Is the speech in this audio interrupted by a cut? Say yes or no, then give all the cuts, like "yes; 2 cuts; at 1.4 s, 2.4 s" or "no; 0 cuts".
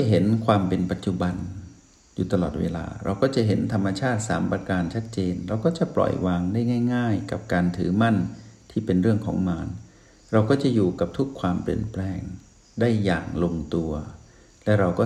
no; 0 cuts